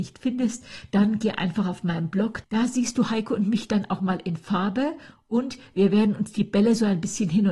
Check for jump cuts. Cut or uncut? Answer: cut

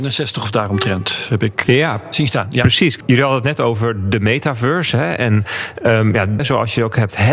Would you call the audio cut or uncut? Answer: cut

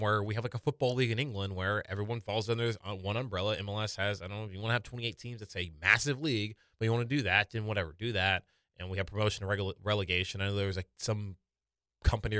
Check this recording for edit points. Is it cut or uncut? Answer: uncut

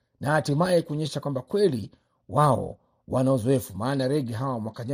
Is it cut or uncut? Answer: uncut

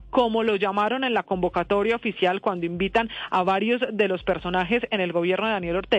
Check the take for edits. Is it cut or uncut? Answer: uncut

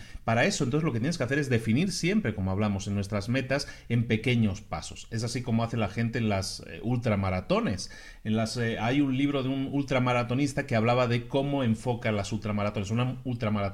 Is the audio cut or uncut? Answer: uncut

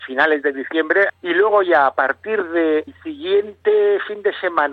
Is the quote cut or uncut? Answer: cut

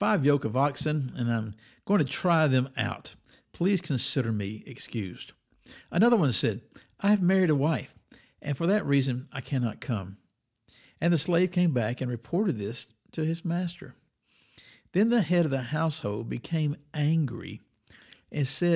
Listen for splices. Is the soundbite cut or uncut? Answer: uncut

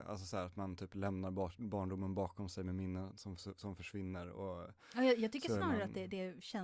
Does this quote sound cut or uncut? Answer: uncut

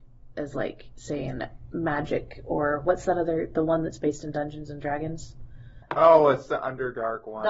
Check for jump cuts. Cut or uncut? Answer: uncut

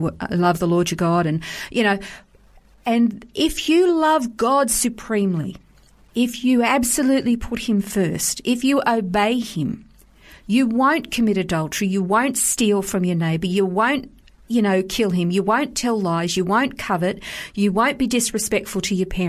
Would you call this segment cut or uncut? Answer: uncut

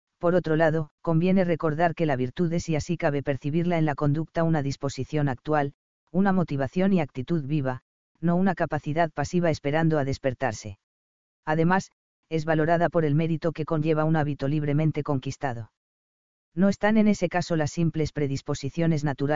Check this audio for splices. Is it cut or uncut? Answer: cut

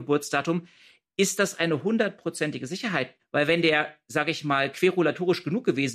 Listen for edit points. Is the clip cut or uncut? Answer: cut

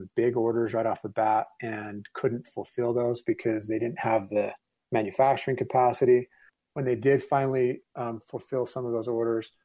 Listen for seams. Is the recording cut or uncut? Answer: uncut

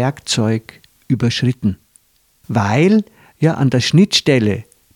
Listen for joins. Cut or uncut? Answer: cut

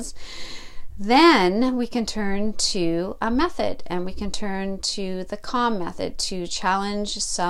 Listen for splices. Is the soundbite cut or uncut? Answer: uncut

